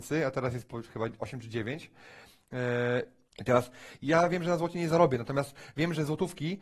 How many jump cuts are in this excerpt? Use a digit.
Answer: 1